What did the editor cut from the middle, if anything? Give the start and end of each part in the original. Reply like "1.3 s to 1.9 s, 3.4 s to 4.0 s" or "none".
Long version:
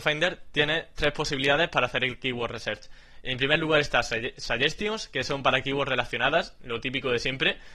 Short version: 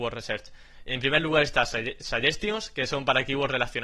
none